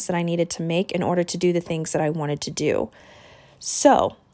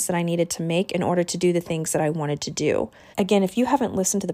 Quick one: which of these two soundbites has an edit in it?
second; 1 cut; at 3.1 s

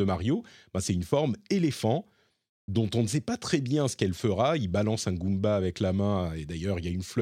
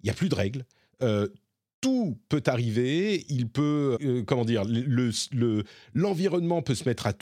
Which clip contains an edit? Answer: second; 1 cut; at 4.0 s

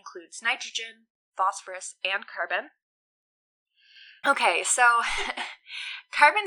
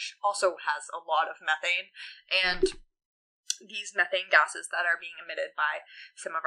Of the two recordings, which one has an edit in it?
first; 1 cut; at 4.2 s

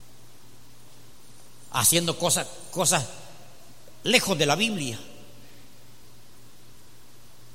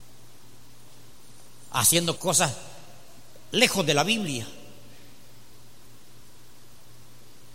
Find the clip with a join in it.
second; 1 cut; at 2.2 s

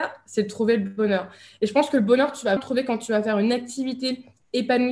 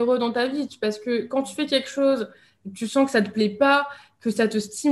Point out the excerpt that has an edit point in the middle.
first; 1 cut; at 2.6 s

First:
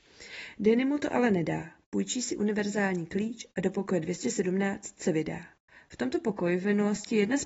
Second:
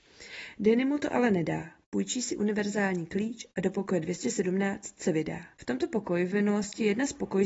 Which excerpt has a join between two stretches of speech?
second; 1 cut; at 5.5 s

